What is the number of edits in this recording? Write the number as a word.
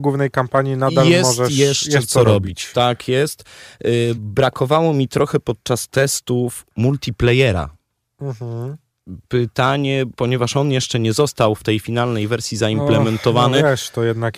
zero